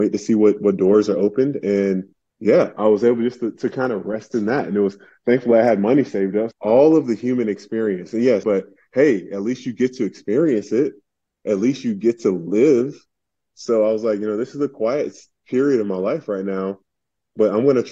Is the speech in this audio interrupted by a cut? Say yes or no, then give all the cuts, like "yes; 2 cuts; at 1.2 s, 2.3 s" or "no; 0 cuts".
yes; 2 cuts; at 6.5 s, 8.4 s